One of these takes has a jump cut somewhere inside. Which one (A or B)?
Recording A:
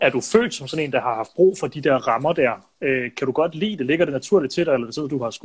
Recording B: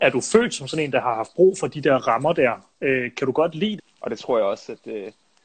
B